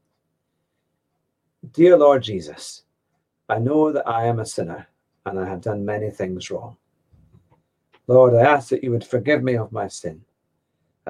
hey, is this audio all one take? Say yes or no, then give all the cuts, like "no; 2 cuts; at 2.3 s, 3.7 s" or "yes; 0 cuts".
yes; 0 cuts